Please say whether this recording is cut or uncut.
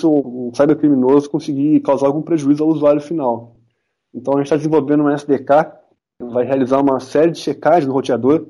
uncut